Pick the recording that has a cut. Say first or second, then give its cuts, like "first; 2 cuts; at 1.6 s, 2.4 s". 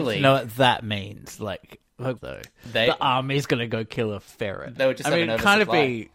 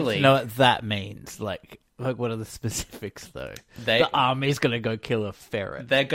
first; 2 cuts; at 2.2 s, 4.8 s